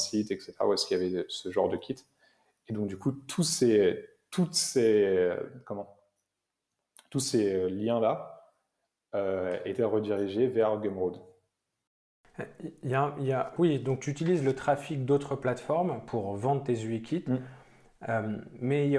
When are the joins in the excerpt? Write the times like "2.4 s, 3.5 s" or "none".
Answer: 13.6 s